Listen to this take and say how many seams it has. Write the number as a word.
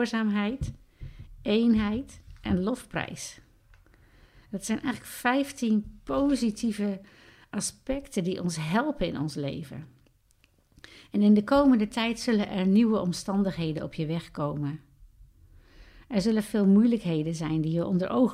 zero